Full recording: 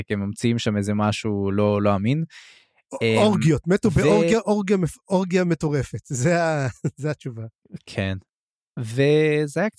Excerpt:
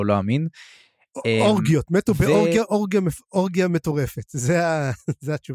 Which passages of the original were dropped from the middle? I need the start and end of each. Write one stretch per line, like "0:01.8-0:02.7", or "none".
none